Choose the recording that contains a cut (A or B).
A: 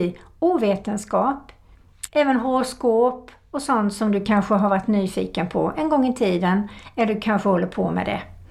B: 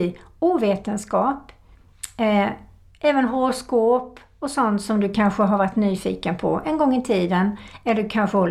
A